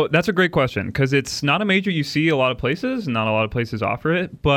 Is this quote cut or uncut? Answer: uncut